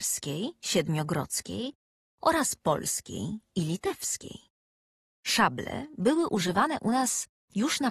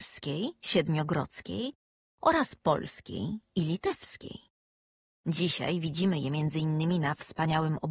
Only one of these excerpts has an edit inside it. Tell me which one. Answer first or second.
second